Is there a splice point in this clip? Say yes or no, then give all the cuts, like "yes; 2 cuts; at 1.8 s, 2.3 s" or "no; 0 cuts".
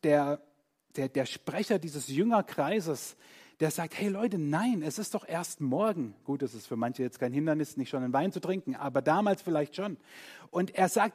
no; 0 cuts